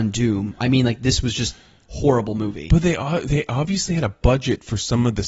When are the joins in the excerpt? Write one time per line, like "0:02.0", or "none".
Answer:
none